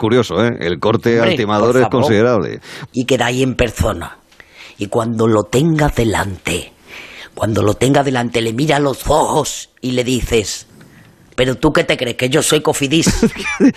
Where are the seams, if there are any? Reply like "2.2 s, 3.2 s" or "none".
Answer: 2.9 s